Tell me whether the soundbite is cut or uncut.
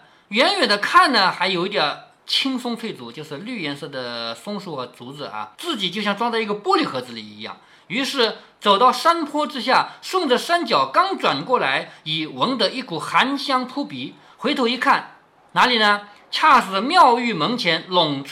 cut